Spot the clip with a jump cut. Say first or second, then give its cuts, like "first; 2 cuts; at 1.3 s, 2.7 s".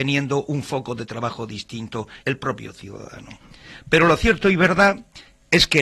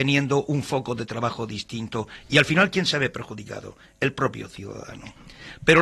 first; 1 cut; at 2.2 s